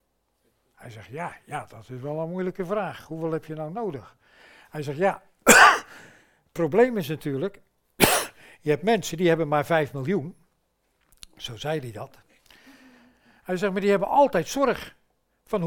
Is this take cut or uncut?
uncut